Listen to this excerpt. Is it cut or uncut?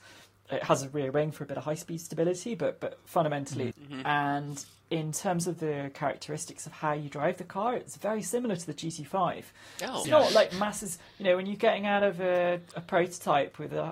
cut